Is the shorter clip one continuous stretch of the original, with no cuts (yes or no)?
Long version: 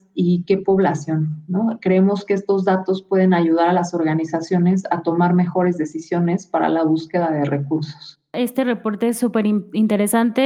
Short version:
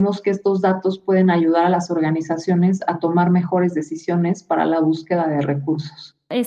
yes